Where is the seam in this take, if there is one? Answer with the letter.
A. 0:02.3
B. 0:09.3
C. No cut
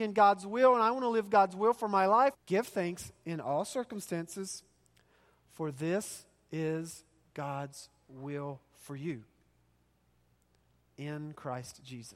A